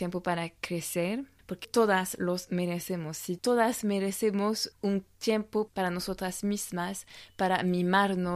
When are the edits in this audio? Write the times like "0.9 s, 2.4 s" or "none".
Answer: 1.6 s